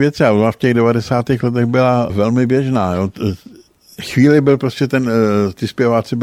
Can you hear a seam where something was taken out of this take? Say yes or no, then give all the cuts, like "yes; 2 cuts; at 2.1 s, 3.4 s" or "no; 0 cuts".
no; 0 cuts